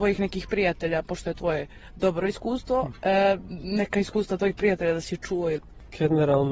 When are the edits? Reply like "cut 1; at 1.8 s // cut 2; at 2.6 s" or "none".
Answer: none